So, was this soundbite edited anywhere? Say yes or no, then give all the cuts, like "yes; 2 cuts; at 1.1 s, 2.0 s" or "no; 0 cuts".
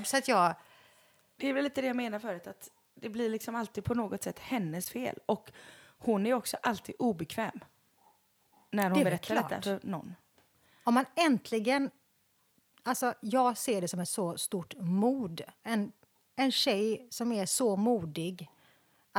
no; 0 cuts